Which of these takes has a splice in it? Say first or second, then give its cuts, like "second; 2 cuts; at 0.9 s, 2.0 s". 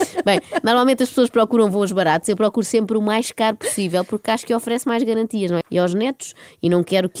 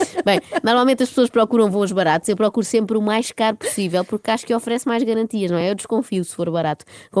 first; 1 cut; at 5.6 s